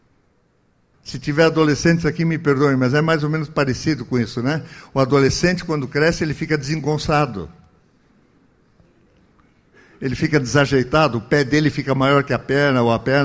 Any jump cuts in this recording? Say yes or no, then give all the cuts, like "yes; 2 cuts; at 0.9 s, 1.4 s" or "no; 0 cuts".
yes; 1 cut; at 0.9 s